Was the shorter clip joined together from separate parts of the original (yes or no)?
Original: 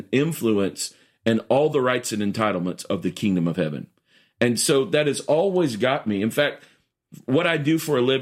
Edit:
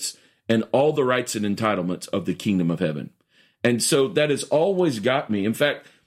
no